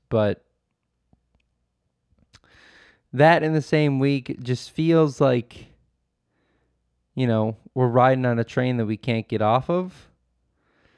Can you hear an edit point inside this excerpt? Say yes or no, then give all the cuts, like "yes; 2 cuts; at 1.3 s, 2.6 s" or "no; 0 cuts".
no; 0 cuts